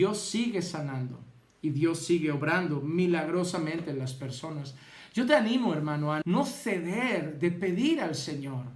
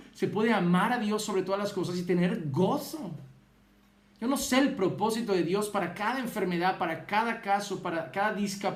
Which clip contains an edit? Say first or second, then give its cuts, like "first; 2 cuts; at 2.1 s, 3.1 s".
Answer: first; 1 cut; at 6.2 s